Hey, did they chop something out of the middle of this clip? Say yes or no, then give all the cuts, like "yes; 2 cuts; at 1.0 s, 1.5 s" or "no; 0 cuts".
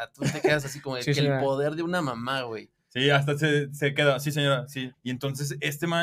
yes; 1 cut; at 4.9 s